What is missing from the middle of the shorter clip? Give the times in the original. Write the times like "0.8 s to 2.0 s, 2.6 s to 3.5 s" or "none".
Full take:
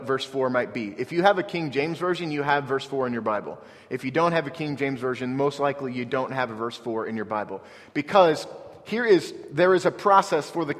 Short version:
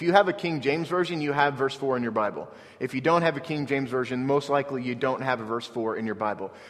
none